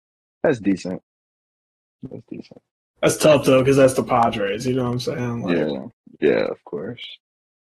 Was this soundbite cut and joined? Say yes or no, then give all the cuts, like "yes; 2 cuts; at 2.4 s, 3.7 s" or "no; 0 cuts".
no; 0 cuts